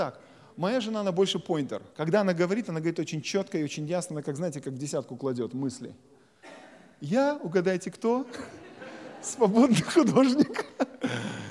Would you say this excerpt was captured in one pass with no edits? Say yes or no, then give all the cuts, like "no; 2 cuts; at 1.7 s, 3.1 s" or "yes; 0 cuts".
yes; 0 cuts